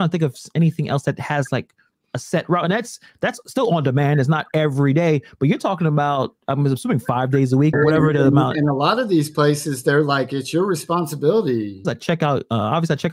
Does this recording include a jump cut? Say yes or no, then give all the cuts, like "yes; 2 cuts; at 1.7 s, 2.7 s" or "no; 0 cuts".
yes; 2 cuts; at 7.7 s, 11.8 s